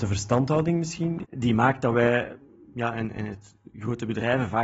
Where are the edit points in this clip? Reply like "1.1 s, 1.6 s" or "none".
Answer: 1.2 s